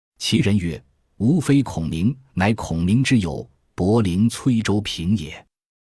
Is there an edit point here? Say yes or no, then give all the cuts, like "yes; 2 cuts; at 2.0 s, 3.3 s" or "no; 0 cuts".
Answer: no; 0 cuts